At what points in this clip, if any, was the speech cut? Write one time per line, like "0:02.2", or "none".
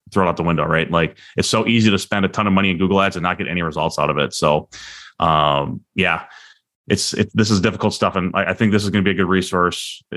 none